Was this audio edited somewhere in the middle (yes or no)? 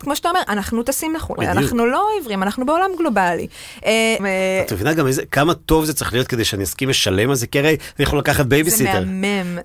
yes